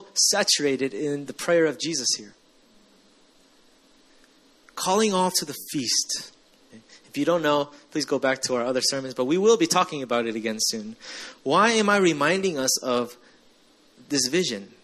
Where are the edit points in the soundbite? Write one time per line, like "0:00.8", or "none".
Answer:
0:06.7